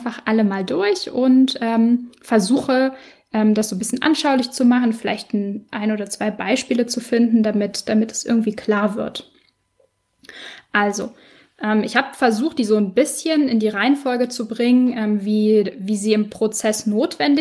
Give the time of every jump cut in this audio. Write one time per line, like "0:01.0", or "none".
none